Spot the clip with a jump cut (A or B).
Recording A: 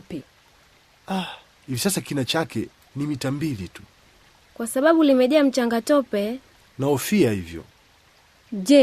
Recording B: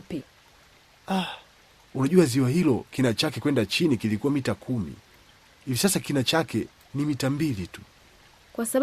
A